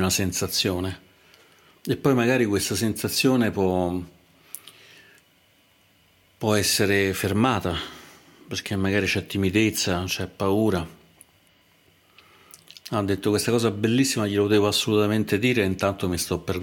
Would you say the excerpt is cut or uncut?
cut